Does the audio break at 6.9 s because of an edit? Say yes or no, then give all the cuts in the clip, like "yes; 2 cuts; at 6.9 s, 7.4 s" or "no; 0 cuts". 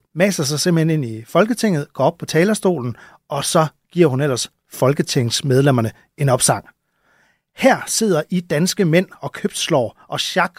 no; 0 cuts